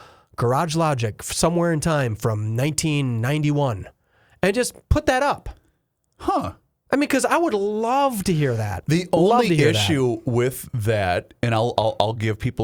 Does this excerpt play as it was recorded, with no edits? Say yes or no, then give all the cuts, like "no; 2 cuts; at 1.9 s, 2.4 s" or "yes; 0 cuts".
yes; 0 cuts